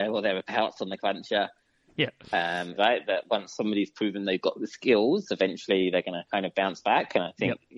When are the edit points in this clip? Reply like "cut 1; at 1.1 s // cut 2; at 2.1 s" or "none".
cut 1; at 2.8 s